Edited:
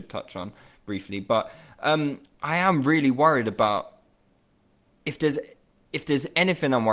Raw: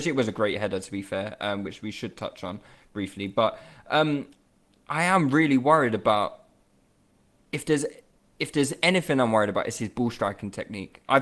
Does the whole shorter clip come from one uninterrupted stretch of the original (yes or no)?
no